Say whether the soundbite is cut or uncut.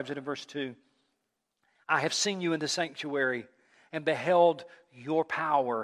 uncut